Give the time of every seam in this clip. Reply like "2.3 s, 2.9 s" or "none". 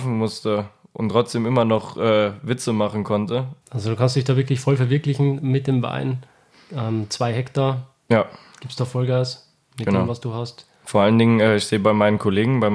3.6 s